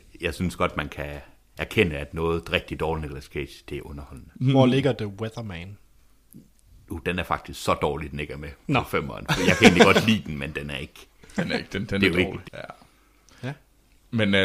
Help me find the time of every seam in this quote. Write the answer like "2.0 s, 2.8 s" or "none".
12.4 s